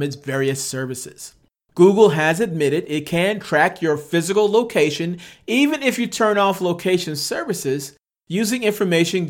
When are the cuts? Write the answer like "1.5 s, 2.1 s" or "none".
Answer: 1.6 s